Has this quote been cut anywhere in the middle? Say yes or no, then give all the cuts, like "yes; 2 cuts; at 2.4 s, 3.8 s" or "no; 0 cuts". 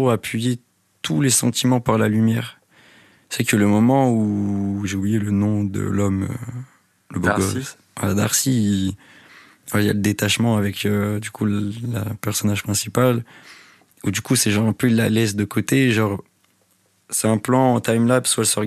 no; 0 cuts